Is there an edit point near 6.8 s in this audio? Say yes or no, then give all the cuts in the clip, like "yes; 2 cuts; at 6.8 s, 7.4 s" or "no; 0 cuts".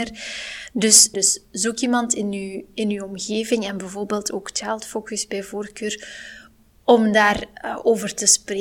no; 1 cut; at 1.1 s